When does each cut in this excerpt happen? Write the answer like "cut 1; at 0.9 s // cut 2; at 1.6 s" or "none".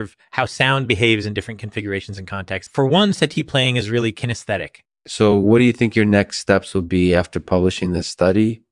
cut 1; at 2.7 s // cut 2; at 4.9 s